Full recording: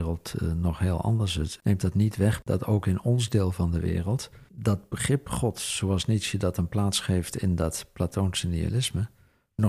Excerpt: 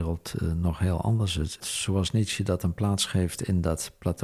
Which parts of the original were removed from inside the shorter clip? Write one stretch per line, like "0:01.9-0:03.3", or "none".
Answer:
0:01.6-0:05.5